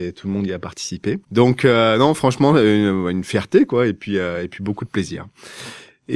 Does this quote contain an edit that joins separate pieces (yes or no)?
no